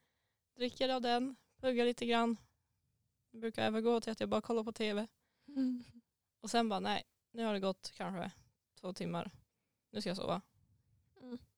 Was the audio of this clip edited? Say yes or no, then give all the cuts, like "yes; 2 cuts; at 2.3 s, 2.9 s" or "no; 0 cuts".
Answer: no; 0 cuts